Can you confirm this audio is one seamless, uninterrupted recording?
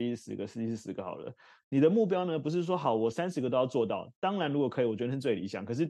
yes; 0 cuts

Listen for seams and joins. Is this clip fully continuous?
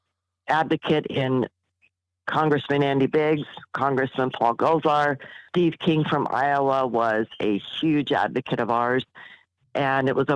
yes; 0 cuts

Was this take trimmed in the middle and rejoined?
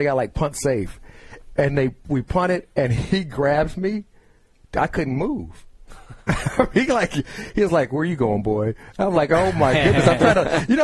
no; 0 cuts

